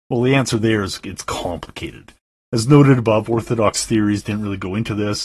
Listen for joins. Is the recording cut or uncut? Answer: uncut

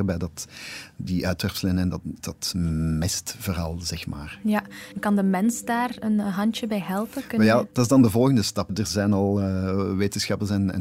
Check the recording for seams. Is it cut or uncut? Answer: uncut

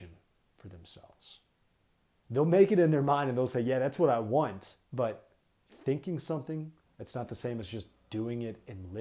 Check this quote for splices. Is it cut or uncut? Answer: cut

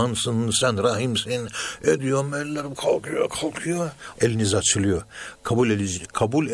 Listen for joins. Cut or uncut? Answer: cut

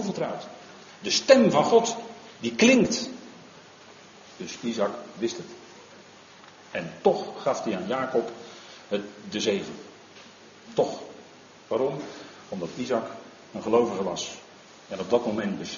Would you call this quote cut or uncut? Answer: cut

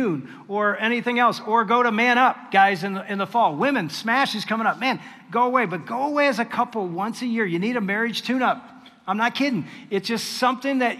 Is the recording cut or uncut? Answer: uncut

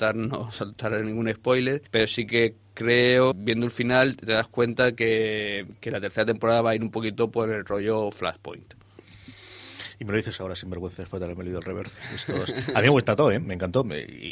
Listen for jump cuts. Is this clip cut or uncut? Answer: cut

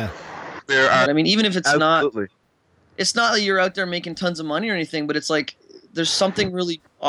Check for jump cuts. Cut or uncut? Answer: cut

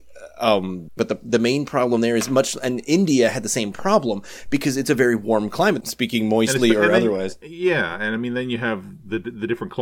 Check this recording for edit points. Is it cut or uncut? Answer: cut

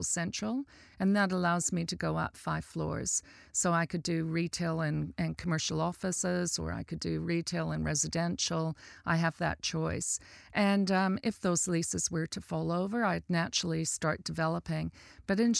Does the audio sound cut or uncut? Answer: uncut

